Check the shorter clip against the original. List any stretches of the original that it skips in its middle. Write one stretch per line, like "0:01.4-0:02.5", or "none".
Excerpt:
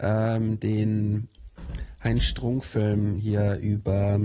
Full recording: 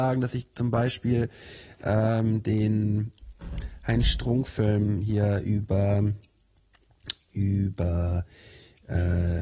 none